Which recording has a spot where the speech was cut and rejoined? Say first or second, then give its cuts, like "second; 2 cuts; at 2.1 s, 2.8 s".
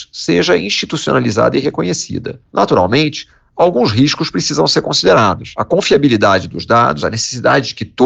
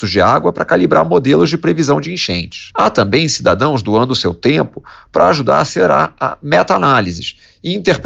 first; 2 cuts; at 2.4 s, 7.0 s